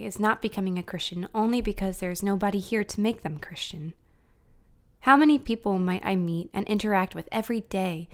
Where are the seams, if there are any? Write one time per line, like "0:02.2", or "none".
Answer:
none